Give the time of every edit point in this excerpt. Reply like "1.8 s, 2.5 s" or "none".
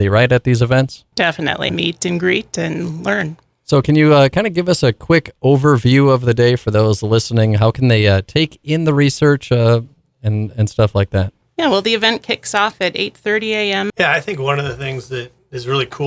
1.7 s, 13.9 s

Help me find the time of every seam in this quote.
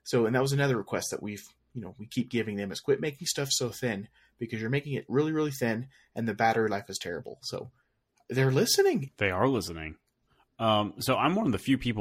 9.1 s

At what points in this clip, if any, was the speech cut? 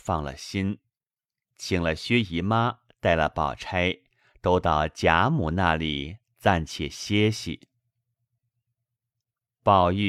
none

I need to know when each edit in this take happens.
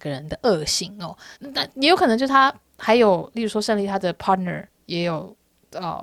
1.4 s

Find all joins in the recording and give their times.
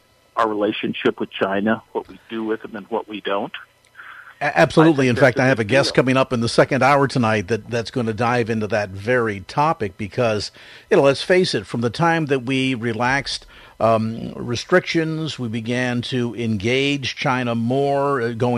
1.9 s

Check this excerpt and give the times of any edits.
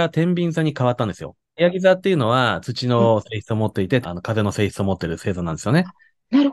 1.6 s, 4.0 s

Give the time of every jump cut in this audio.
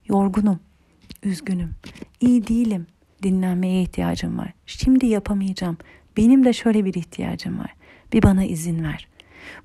none

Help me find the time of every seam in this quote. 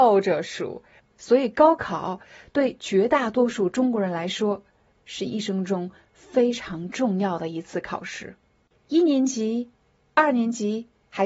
1.0 s, 8.7 s

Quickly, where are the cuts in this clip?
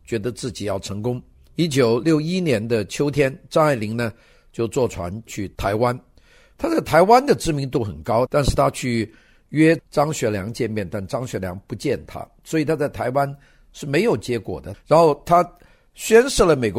8.3 s, 14.7 s

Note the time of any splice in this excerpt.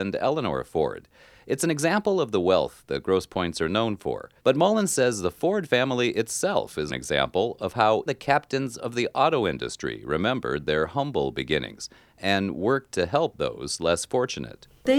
4.4 s, 6.9 s, 8.1 s

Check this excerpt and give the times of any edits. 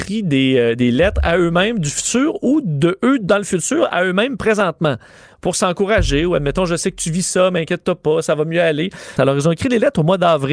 9.2 s

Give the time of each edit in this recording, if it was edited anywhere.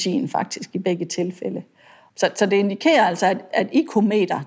none

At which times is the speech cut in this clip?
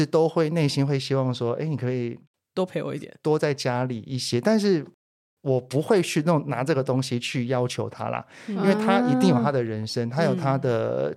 none

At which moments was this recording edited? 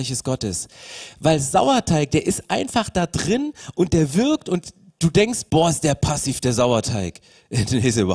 none

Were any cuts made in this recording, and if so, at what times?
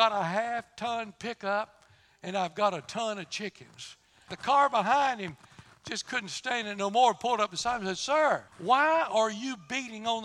4.3 s, 8.5 s

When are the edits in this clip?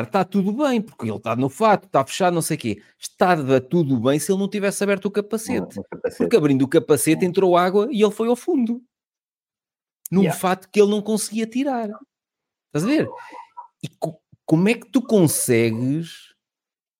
none

